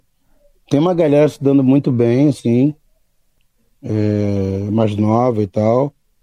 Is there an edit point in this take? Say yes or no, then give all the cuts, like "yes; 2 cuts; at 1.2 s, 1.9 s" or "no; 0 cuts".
no; 0 cuts